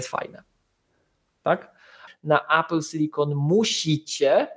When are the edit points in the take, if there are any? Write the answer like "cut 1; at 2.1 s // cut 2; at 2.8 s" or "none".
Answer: cut 1; at 2.1 s

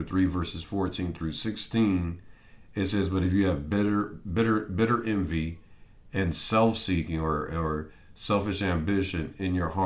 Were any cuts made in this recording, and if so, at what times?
none

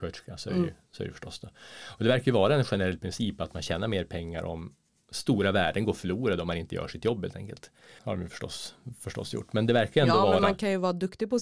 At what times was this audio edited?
cut 1; at 5.1 s // cut 2; at 8.0 s

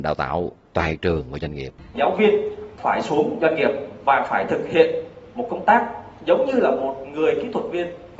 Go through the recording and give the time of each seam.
cut 1; at 1.9 s

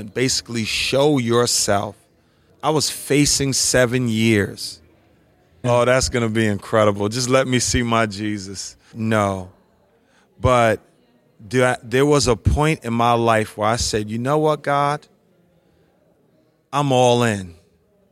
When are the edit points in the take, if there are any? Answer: cut 1; at 2.5 s // cut 2; at 5.6 s // cut 3; at 8.9 s

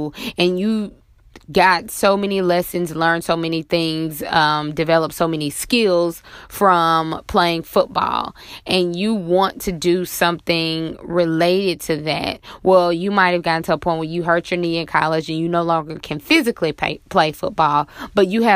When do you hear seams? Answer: none

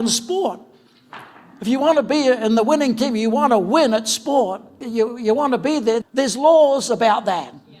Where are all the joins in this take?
cut 1; at 4.8 s // cut 2; at 6.0 s

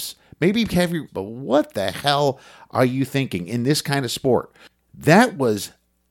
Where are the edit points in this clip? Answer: cut 1; at 1.1 s // cut 2; at 4.8 s

